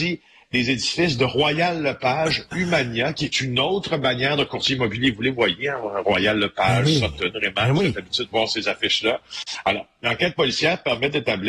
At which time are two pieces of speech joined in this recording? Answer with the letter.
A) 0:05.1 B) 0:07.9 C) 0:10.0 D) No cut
D